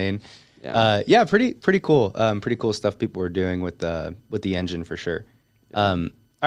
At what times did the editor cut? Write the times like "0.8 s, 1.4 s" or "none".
none